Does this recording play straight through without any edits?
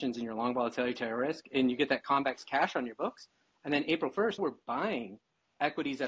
no; 1 cut; at 4.4 s

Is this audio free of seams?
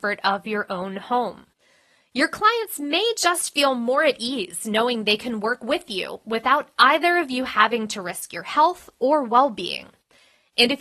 yes; 0 cuts

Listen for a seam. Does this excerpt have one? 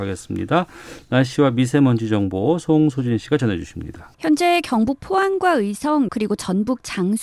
yes; 2 cuts; at 4.1 s, 6.1 s

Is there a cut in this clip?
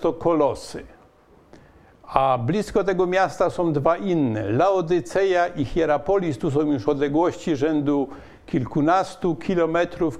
no; 0 cuts

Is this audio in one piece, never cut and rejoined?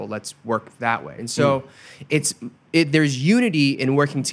no; 1 cut; at 1.2 s

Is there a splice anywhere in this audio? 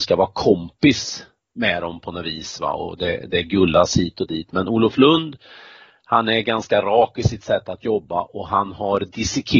no; 0 cuts

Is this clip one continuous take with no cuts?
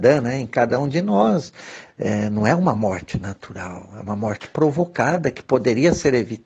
no; 1 cut; at 1.9 s

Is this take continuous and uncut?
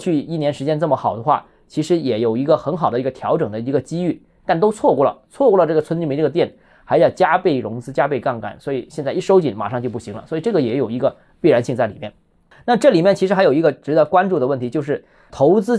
yes; 0 cuts

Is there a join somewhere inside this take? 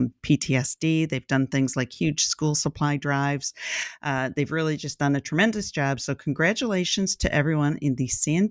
no; 0 cuts

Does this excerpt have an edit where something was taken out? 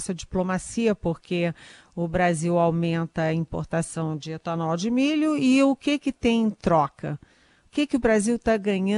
no; 0 cuts

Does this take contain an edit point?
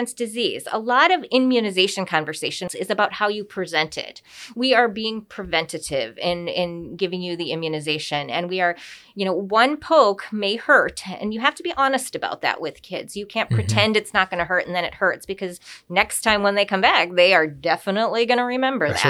yes; 1 cut; at 2.7 s

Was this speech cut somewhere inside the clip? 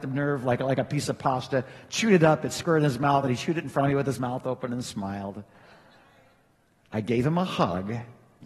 yes; 1 cut; at 5.5 s

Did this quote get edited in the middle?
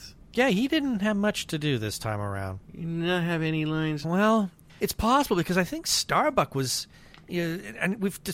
yes; 1 cut; at 4.0 s

